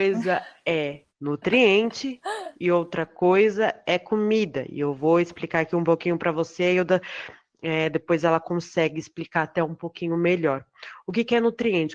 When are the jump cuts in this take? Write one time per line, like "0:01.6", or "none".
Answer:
0:01.1